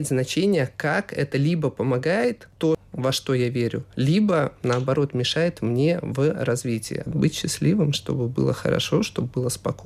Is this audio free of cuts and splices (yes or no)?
no